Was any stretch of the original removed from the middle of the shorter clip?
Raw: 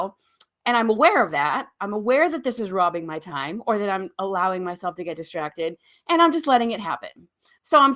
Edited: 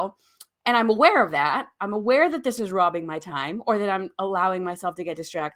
no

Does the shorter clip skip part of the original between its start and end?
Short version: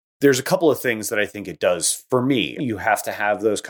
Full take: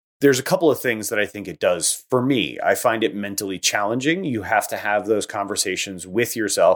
yes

